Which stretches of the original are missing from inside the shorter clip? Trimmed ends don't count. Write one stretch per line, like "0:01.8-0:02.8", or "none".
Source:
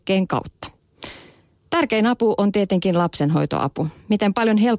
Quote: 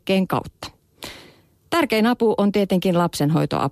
none